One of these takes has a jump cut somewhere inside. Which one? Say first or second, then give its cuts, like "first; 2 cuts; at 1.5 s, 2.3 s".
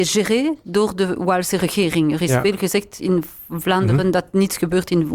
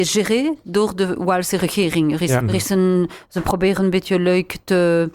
second; 1 cut; at 2.4 s